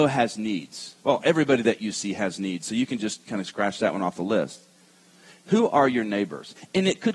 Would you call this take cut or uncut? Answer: cut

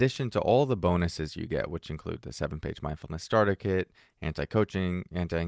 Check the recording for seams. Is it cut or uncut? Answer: uncut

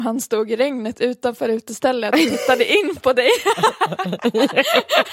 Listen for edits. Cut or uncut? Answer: uncut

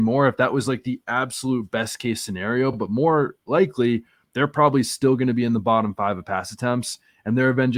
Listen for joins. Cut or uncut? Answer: uncut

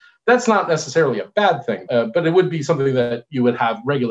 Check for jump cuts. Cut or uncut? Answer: cut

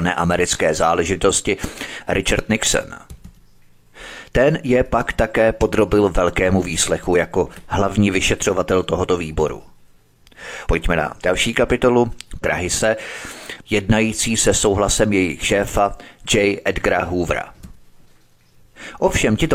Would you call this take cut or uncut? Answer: cut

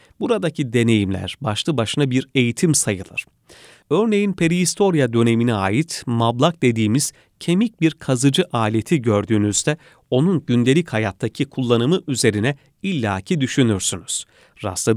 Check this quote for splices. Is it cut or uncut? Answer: uncut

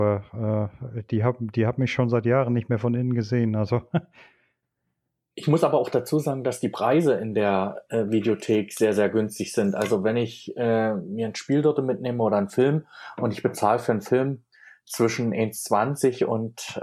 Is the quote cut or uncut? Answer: uncut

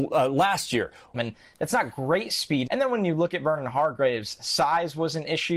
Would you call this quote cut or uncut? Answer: cut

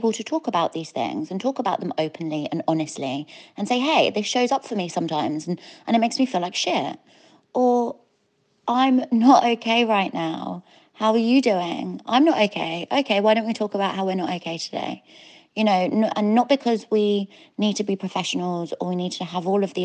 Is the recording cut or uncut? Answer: uncut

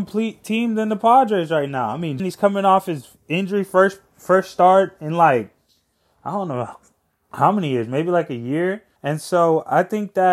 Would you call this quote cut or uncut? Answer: cut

